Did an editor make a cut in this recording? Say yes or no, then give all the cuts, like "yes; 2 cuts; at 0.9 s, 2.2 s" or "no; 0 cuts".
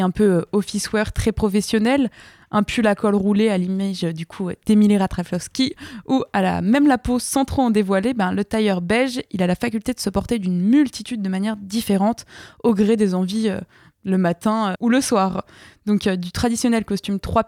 yes; 1 cut; at 14.7 s